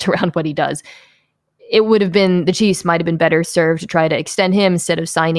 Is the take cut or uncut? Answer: uncut